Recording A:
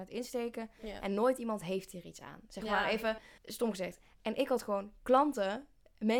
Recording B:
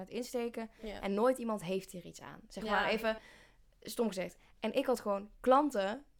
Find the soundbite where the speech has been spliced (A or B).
A